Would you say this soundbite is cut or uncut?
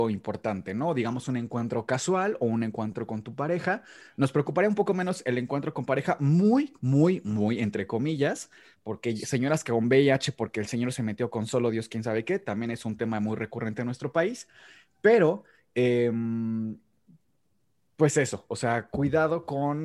uncut